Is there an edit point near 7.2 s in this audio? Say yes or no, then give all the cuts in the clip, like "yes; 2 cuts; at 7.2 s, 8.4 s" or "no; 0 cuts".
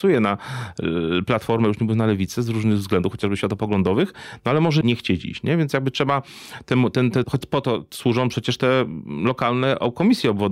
yes; 2 cuts; at 4.8 s, 7.2 s